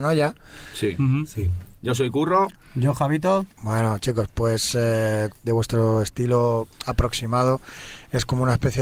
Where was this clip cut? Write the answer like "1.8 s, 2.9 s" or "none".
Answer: 1.8 s, 3.6 s, 5.3 s